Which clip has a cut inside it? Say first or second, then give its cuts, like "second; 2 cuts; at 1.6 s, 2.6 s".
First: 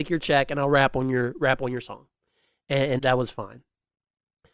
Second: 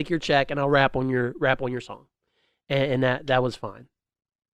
first; 1 cut; at 3.0 s